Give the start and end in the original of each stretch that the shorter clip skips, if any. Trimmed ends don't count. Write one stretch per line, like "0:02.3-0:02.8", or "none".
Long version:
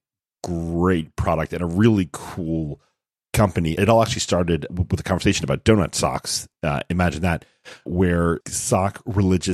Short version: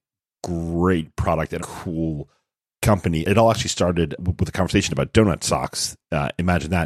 0:01.6-0:02.1